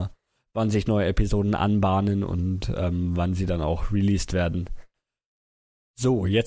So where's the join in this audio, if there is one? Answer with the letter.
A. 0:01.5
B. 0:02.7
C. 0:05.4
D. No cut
D